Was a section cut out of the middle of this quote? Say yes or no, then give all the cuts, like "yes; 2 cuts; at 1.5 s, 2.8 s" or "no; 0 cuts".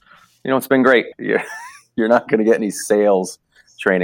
yes; 1 cut; at 1.1 s